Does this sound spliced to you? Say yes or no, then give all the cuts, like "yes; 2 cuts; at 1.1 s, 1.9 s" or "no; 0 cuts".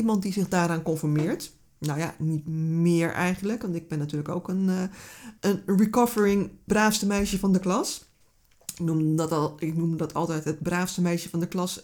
yes; 2 cuts; at 5.4 s, 6.7 s